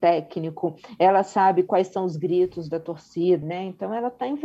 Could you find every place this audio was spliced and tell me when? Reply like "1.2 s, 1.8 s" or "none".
3.4 s